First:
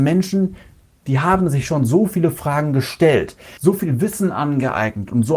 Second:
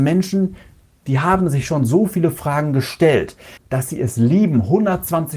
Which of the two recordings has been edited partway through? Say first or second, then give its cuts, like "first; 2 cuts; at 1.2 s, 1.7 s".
second; 1 cut; at 3.6 s